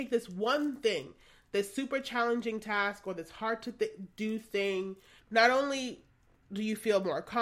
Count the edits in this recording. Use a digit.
1